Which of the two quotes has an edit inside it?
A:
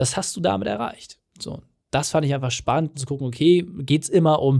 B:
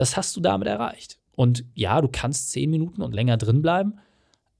A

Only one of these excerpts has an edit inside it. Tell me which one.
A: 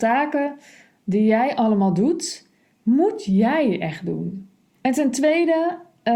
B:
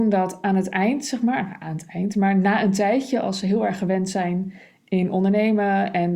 A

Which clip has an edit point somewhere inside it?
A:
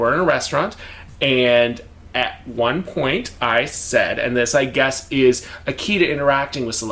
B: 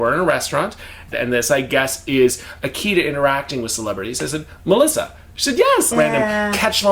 B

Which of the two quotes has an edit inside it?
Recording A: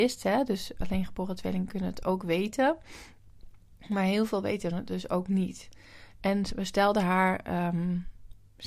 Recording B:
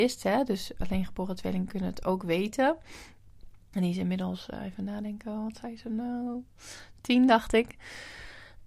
B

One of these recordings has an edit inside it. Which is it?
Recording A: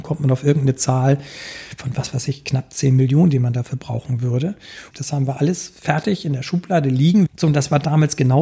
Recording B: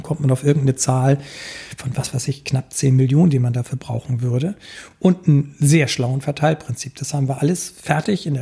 A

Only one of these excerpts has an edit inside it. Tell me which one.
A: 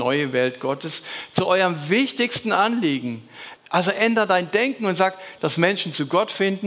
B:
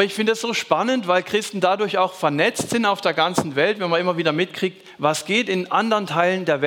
A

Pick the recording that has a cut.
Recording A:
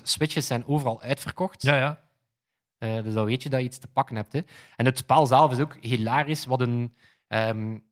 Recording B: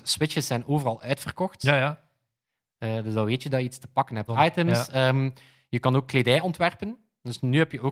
B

